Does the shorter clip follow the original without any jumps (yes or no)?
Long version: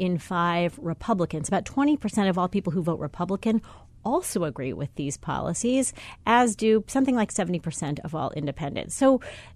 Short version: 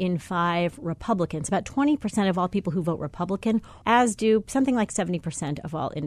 no